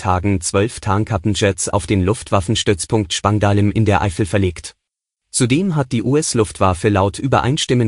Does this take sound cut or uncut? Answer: cut